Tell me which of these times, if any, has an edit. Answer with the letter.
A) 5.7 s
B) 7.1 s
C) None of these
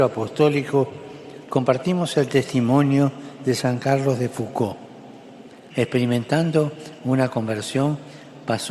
A